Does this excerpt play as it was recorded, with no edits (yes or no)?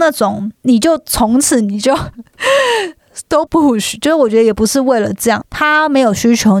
no